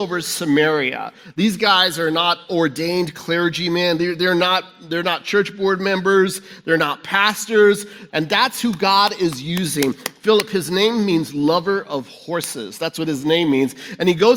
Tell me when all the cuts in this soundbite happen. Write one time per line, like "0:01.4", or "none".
0:08.1